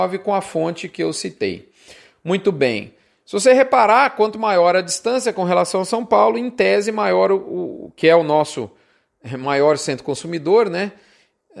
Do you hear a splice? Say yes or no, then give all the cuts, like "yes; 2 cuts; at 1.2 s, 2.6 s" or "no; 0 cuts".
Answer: no; 0 cuts